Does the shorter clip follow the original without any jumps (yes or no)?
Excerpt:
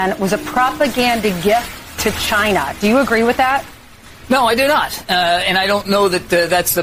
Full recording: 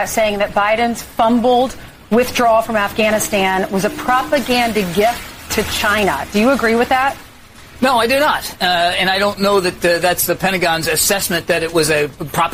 yes